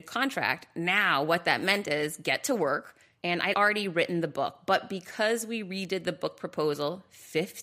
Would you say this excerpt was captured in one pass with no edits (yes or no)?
no